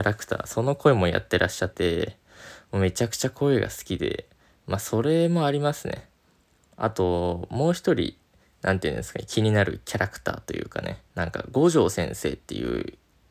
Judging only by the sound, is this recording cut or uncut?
cut